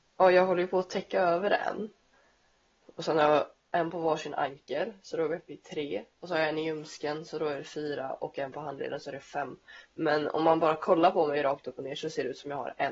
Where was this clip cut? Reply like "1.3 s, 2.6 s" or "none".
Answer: 2.8 s